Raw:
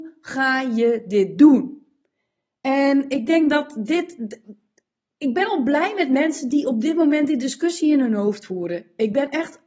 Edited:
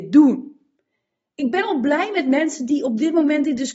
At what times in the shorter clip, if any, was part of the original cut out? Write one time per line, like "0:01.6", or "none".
0:01.3